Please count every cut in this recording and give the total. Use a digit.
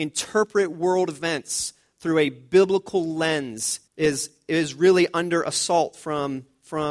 1